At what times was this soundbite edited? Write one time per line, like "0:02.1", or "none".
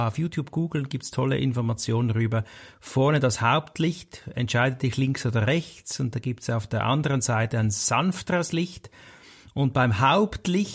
none